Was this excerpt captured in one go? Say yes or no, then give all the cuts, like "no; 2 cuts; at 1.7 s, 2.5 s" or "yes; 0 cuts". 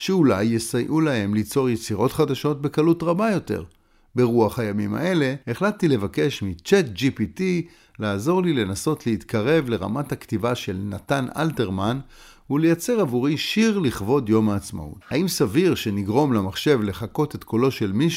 no; 2 cuts; at 5.4 s, 15.0 s